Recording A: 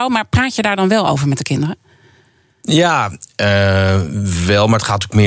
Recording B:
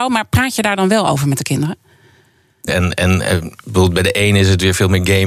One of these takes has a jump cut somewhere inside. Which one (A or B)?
B